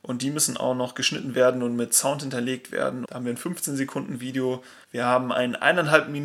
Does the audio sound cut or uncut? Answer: cut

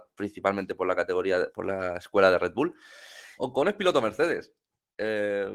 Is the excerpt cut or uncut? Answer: cut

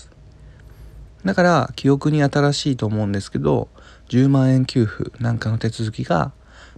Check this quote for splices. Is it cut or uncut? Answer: cut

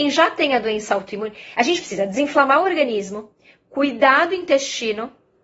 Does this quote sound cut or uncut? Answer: uncut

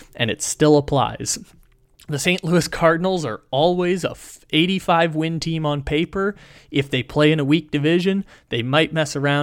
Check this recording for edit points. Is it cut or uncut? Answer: uncut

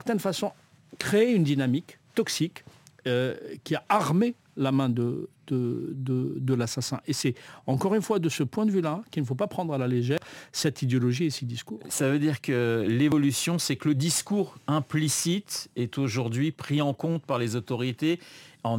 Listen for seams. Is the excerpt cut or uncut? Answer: uncut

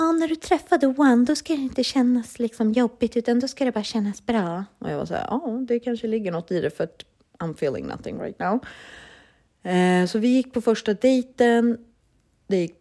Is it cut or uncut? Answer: uncut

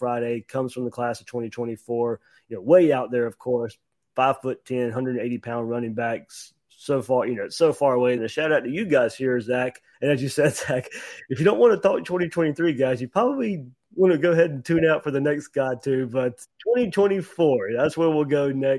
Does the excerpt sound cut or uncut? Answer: cut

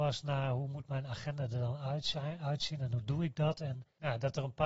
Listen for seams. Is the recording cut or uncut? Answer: uncut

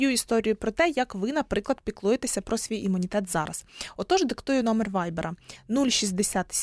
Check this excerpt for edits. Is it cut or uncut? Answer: uncut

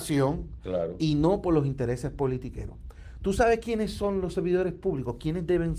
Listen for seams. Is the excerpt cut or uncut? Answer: uncut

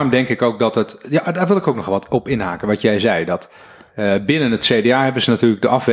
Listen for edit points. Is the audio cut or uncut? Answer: uncut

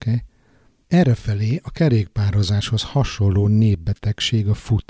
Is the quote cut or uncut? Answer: uncut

